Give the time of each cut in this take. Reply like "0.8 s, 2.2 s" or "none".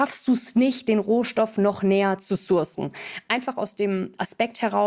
none